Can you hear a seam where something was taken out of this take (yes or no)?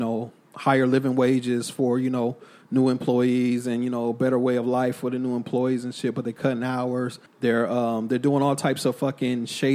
yes